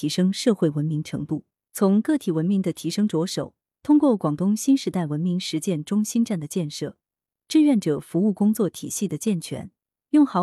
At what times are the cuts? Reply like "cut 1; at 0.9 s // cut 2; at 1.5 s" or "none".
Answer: none